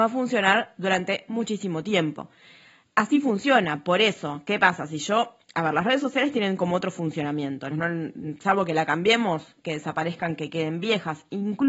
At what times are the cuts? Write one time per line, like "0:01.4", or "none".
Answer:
0:07.7
0:09.6